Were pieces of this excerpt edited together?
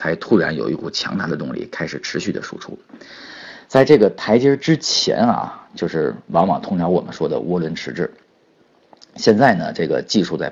no; 0 cuts

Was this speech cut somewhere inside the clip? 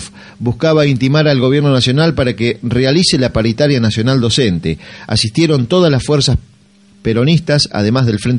no; 0 cuts

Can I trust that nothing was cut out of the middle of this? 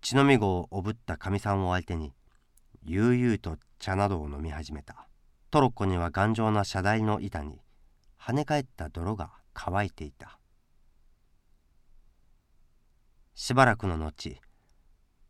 no; 2 cuts; at 5.4 s, 9.5 s

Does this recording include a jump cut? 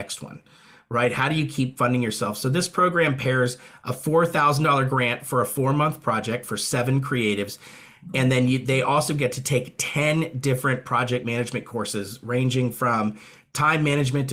no; 0 cuts

